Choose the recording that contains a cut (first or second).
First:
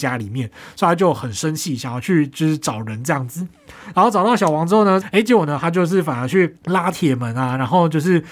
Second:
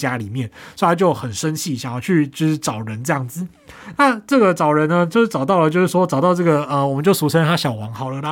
first